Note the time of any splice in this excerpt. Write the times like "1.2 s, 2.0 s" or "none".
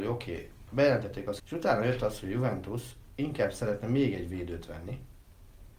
1.4 s